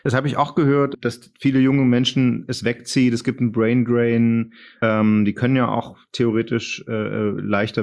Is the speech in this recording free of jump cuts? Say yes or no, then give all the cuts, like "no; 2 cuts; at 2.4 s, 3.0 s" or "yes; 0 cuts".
yes; 0 cuts